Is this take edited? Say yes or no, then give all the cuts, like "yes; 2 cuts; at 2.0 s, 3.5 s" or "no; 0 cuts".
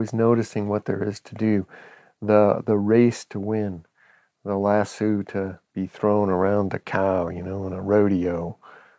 yes; 1 cut; at 5.7 s